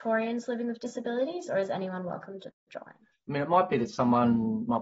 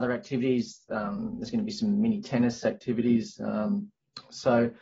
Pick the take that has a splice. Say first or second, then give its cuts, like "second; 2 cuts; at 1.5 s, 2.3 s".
first; 1 cut; at 3.1 s